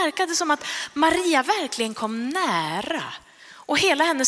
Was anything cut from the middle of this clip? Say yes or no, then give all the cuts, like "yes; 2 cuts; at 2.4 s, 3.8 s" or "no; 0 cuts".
no; 0 cuts